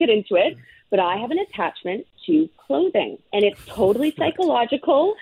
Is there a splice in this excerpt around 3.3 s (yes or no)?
yes